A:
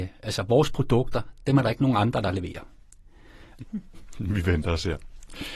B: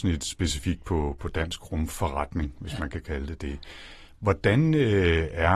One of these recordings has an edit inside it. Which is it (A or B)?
A